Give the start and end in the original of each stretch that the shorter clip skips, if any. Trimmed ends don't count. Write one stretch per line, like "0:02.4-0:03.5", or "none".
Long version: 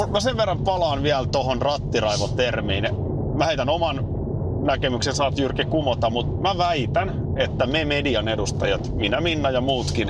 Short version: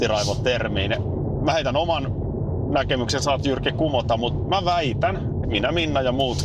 0:07.4-0:08.9